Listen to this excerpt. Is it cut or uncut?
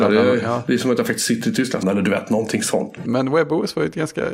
cut